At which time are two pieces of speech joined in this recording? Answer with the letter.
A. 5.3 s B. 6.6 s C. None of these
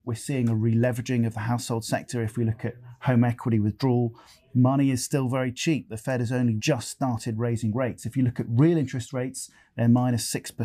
B